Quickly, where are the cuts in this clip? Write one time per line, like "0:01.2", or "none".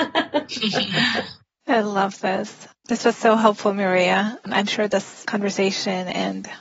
0:02.8